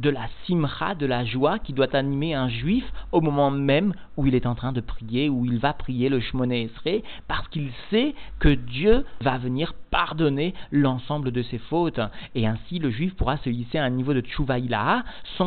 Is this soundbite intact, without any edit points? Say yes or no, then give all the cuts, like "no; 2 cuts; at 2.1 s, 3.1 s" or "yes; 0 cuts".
yes; 0 cuts